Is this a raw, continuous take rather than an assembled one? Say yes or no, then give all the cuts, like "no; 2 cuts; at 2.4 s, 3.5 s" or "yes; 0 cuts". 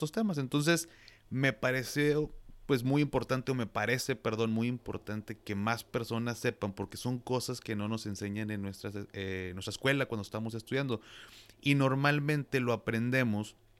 yes; 0 cuts